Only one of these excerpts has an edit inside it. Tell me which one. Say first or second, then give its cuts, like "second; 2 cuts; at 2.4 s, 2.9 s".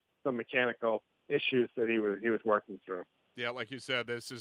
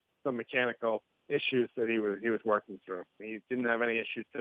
second; 1 cut; at 3.2 s